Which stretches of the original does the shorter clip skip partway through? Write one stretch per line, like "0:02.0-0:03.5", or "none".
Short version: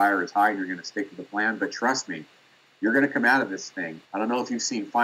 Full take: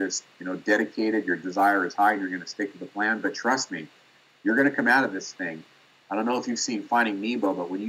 0:05.7-0:06.0